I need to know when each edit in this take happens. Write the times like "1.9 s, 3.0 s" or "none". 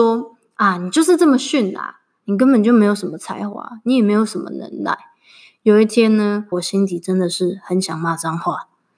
6.5 s